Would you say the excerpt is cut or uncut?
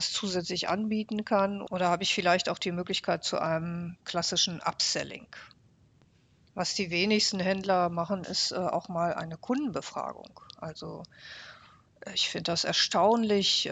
uncut